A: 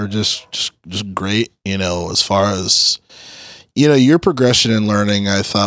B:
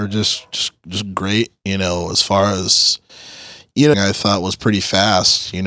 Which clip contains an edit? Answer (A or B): B